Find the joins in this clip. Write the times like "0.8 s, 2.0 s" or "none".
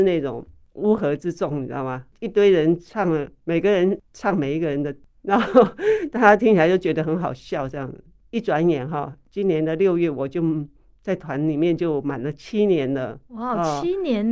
none